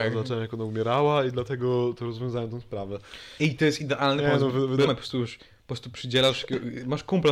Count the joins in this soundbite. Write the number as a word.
two